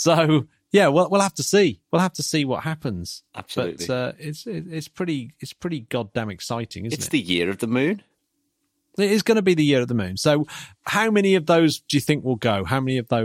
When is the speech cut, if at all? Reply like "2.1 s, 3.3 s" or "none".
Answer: none